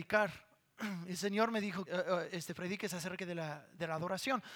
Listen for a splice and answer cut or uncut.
cut